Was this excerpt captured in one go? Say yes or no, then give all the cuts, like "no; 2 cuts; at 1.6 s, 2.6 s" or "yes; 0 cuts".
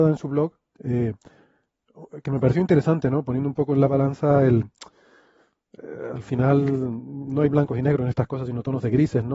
yes; 0 cuts